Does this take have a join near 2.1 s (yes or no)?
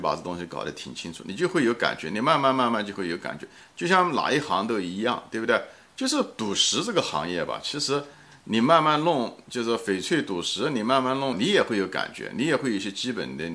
no